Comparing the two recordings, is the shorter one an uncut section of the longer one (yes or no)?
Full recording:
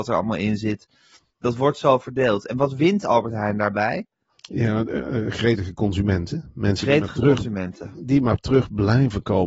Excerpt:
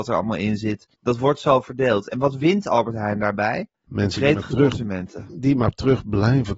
no